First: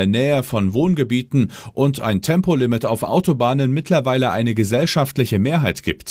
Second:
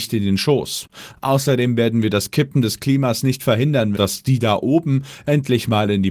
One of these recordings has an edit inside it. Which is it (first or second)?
second